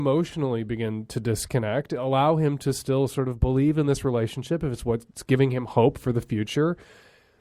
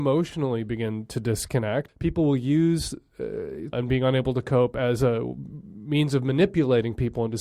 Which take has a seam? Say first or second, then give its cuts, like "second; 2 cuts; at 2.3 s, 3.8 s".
second; 2 cuts; at 1.9 s, 3.7 s